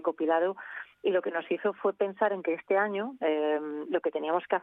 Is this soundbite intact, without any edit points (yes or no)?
no